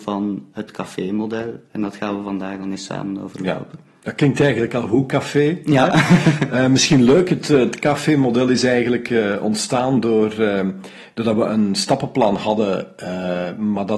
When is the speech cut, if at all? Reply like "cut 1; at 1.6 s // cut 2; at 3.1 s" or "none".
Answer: none